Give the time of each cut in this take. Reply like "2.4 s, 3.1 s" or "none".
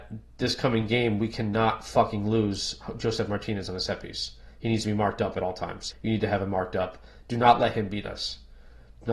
5.9 s, 7.2 s

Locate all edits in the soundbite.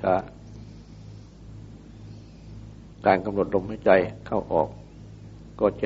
none

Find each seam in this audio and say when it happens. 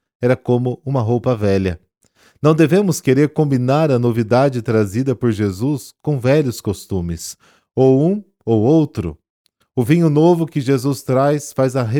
none

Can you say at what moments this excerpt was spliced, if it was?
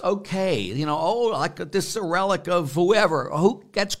none

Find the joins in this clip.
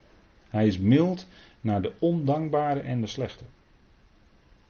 none

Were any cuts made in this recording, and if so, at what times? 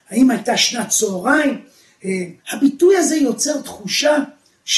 2.4 s

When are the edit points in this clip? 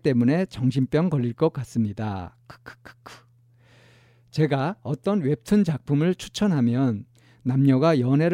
none

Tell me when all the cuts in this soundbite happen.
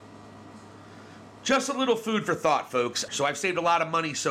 3.1 s

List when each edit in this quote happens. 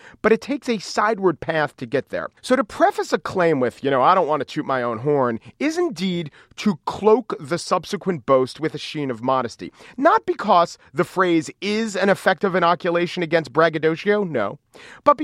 2.4 s

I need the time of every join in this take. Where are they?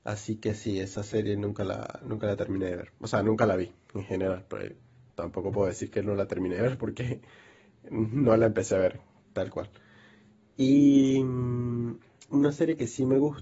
5.1 s

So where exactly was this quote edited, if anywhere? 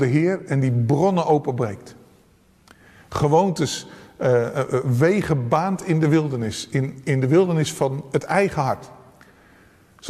none

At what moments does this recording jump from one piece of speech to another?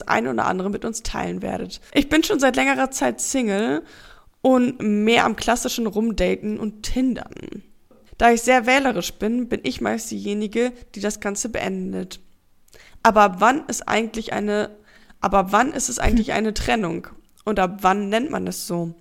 8.1 s

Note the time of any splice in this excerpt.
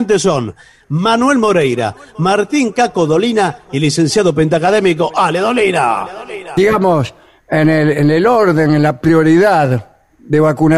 6.6 s

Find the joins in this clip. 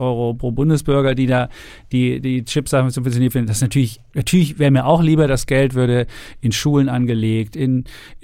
none

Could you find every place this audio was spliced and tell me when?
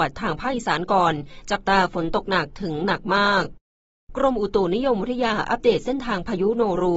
none

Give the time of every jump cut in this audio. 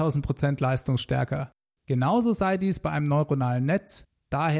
1.8 s

